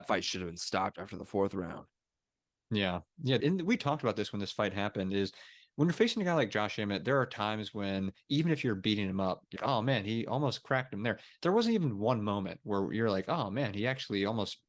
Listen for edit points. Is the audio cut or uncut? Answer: cut